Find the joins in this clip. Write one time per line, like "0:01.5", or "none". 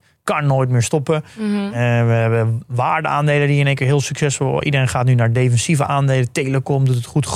none